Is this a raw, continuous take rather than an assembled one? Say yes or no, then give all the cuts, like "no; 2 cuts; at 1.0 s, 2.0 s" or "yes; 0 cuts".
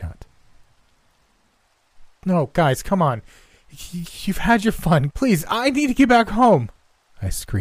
no; 1 cut; at 5.1 s